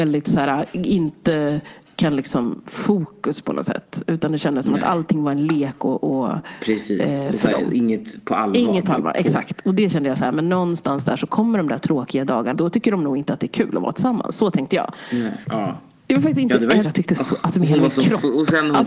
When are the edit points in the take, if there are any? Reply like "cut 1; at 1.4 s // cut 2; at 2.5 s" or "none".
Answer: cut 1; at 12.5 s // cut 2; at 15.4 s // cut 3; at 16.8 s